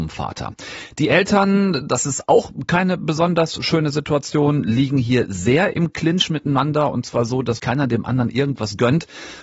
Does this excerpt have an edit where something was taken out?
yes; 1 cut; at 7.6 s

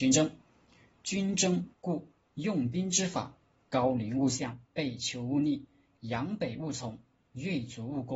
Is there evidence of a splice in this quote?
yes; 2 cuts; at 1.7 s, 4.6 s

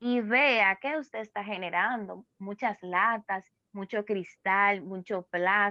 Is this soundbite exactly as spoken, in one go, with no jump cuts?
yes; 0 cuts

